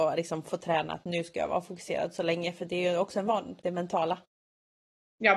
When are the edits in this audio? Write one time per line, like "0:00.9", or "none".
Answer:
0:03.6

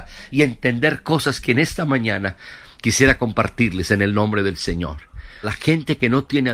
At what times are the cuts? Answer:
0:05.4

